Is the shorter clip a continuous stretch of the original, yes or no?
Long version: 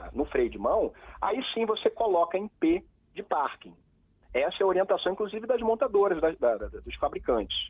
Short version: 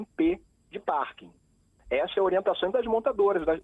no